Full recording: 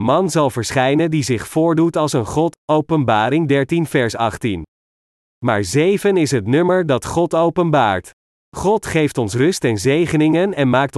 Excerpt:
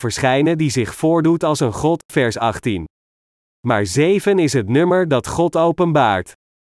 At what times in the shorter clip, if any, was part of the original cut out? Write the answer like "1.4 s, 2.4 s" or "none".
2.1 s